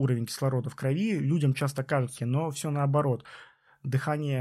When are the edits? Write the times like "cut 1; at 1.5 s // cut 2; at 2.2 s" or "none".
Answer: cut 1; at 2.2 s